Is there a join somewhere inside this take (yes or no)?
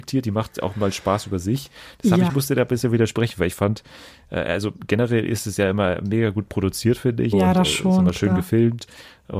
yes